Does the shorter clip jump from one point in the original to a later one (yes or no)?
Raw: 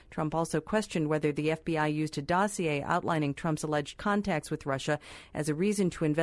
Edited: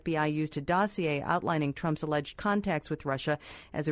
no